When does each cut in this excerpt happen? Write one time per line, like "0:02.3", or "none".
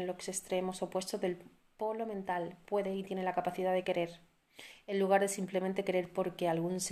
0:03.8